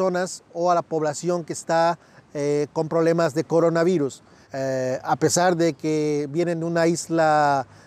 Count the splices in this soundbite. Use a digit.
1